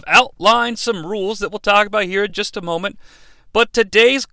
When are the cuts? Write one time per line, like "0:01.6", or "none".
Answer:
none